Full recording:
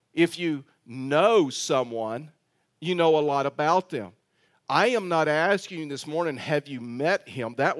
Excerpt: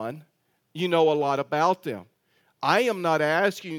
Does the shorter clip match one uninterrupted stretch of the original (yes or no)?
yes